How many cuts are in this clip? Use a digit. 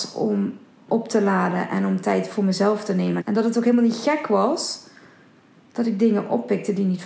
1